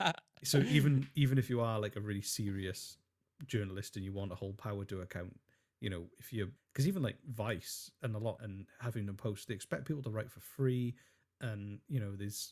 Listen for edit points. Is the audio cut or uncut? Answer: cut